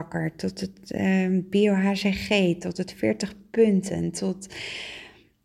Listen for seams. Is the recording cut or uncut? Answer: uncut